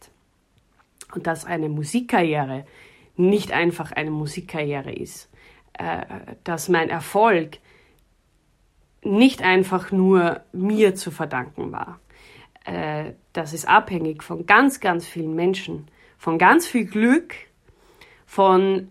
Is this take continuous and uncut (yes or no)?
yes